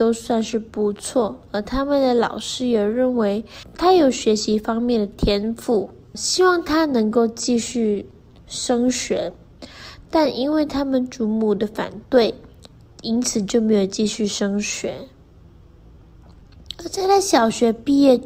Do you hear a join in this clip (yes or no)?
no